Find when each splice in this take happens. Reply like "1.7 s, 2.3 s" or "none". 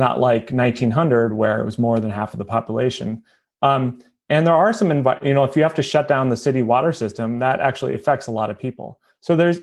none